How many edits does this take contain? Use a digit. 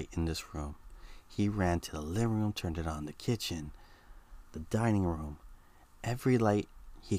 0